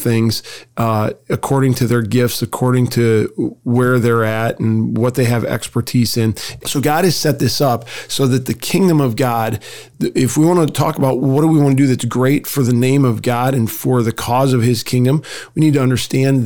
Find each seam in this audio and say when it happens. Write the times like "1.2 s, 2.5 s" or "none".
6.6 s, 11.2 s